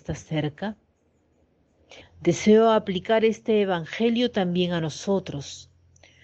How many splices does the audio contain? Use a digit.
1